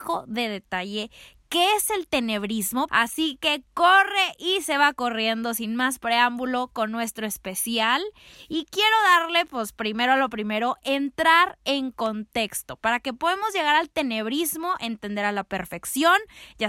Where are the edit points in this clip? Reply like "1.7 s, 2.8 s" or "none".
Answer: 2.9 s, 14.8 s